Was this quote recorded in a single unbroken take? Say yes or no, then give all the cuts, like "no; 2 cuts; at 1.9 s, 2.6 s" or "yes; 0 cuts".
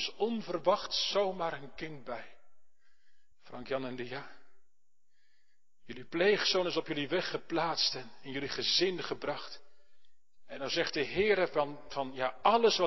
no; 1 cut; at 3.3 s